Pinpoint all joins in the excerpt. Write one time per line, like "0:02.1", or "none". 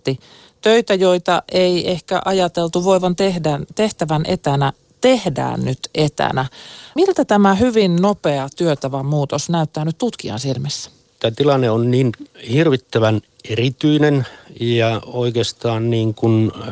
0:07.0

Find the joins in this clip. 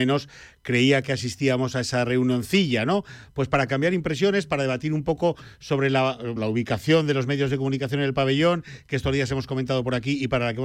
0:06.4

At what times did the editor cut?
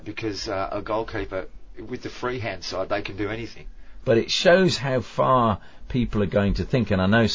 0:01.7
0:04.0

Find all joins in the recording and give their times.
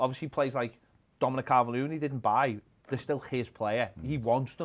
none

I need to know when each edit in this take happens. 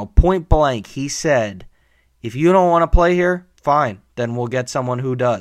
0:03.5

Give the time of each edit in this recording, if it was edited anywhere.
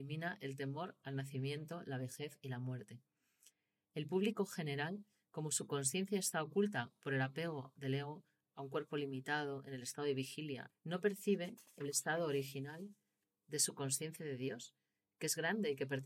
0:10.7

